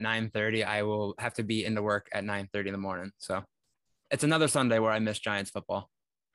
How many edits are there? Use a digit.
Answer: 0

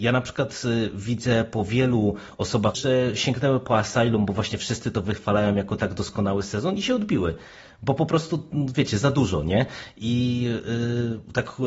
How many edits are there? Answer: 1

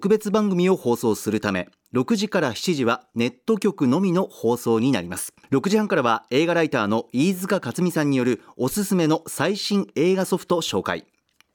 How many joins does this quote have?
1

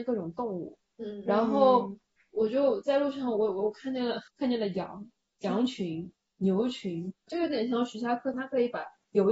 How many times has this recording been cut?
3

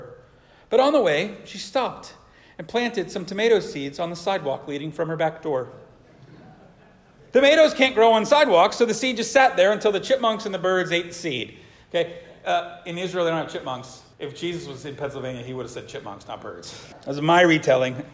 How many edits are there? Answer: 2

